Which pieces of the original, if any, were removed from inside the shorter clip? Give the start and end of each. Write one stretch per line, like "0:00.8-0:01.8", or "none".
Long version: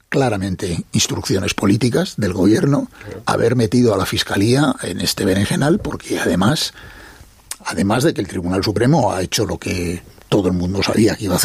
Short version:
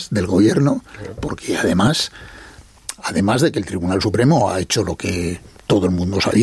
0:03.2-0:05.8